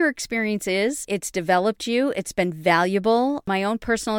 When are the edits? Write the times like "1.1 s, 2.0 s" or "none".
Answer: 1.0 s